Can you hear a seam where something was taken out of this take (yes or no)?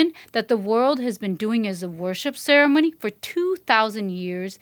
no